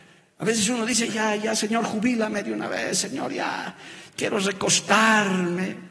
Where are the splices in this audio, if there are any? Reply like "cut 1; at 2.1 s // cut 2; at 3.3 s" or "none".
cut 1; at 1.1 s